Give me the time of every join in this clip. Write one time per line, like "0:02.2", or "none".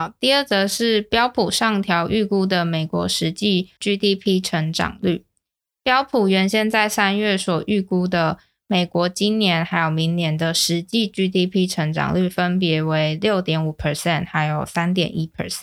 none